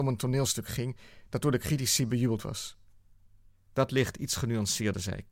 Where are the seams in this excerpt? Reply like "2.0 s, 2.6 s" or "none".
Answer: none